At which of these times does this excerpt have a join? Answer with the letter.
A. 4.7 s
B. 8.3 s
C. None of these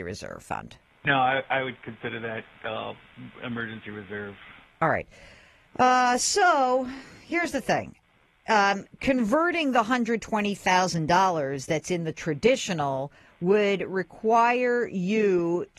A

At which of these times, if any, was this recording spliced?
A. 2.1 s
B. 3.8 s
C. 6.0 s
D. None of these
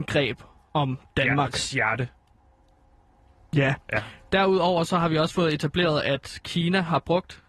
D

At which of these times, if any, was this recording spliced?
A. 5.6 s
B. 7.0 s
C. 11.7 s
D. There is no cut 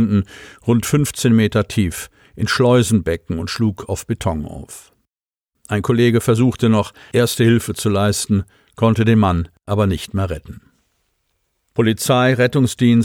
D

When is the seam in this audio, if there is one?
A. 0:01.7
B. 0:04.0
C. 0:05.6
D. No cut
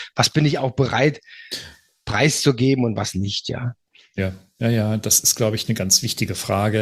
D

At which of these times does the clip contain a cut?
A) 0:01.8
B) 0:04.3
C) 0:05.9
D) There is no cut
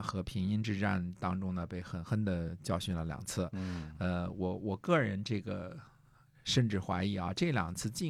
D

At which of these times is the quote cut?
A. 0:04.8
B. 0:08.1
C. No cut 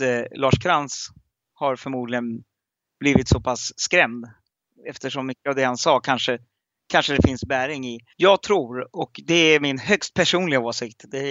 B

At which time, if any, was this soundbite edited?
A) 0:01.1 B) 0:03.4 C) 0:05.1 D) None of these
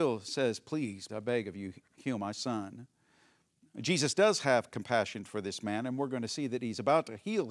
A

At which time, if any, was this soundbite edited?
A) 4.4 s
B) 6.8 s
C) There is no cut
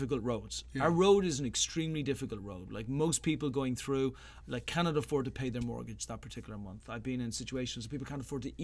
A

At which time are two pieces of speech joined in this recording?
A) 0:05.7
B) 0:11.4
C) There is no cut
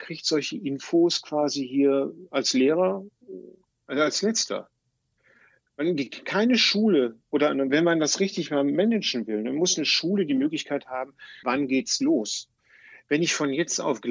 B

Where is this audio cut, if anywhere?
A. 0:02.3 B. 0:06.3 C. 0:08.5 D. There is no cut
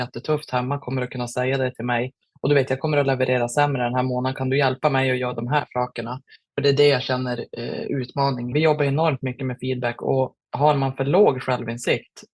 C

